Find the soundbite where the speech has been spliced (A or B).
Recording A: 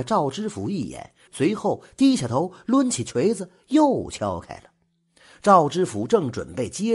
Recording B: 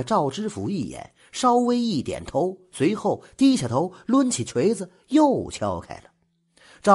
A